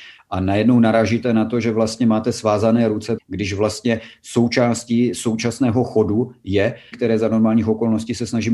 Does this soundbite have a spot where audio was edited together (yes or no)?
yes